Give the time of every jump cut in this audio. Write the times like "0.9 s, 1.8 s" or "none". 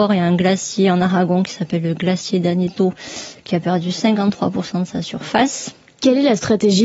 5.9 s